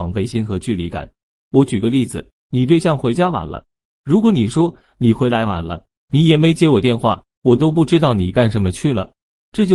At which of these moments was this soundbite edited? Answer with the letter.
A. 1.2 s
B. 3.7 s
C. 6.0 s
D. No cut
C